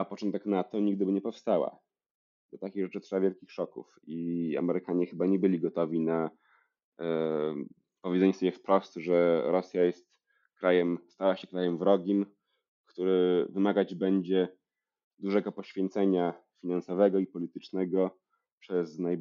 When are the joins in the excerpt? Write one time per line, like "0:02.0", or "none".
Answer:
none